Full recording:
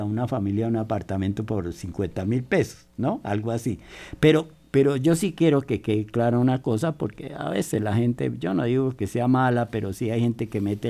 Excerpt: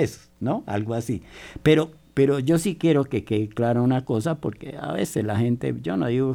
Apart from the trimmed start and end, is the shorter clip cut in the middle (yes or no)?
no